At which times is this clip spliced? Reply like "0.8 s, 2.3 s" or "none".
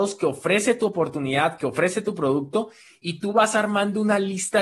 none